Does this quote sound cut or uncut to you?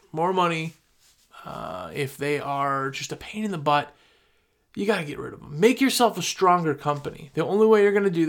uncut